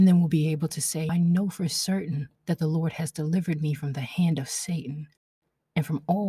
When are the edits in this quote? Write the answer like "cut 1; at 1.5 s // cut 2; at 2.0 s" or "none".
cut 1; at 1.1 s // cut 2; at 2.4 s